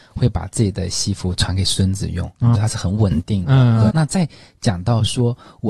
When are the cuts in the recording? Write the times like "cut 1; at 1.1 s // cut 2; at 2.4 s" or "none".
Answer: cut 1; at 2.5 s // cut 2; at 3.9 s